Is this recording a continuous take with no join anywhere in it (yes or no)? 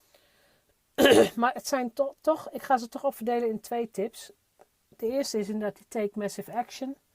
yes